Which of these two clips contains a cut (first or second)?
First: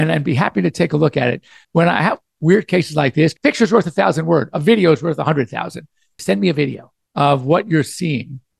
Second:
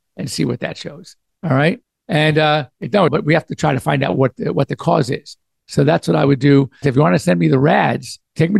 second